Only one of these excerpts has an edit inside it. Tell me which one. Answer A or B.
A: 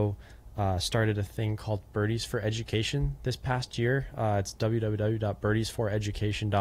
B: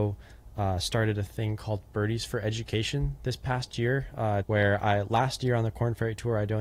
B